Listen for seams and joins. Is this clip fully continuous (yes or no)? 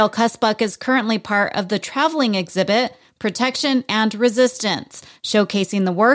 no